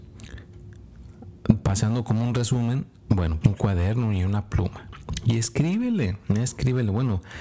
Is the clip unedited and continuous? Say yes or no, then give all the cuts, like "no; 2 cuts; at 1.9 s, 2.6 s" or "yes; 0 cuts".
no; 1 cut; at 3.4 s